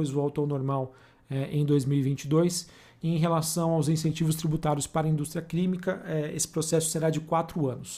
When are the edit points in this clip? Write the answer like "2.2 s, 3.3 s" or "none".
none